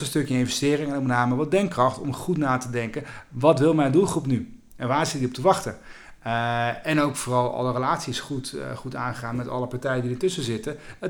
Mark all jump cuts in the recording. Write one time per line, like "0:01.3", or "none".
none